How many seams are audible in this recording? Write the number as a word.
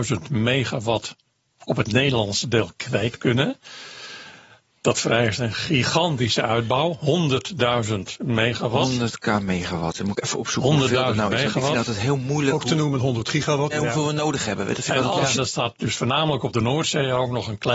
two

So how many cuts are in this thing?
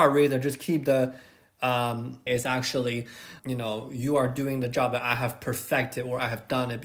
two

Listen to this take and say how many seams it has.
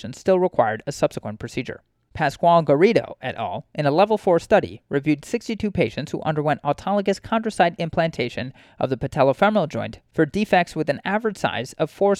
one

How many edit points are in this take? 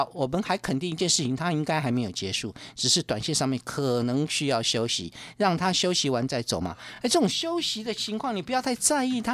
zero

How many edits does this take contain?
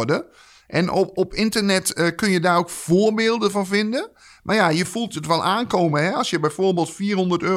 zero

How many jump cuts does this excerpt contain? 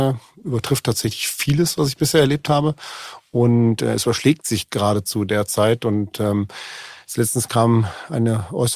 zero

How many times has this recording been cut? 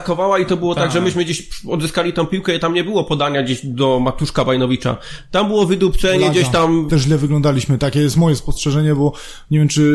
one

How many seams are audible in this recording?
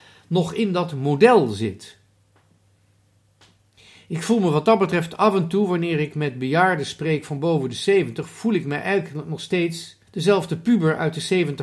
one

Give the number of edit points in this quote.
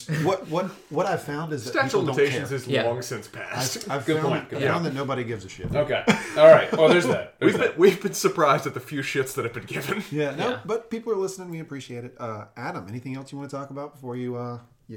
zero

